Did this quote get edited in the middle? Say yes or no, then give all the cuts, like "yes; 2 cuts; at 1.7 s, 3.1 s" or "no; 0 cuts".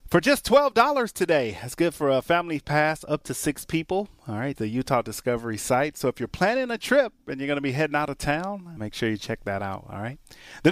yes; 2 cuts; at 4.6 s, 8.8 s